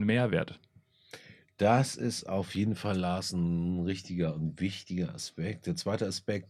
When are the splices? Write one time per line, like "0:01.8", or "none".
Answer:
none